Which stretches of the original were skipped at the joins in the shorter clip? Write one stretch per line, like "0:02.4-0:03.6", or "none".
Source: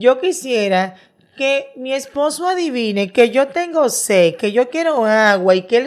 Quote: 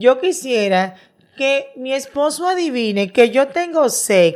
none